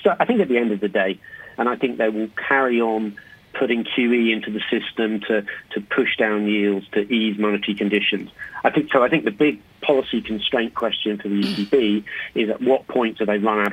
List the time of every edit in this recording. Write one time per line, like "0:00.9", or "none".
0:01.6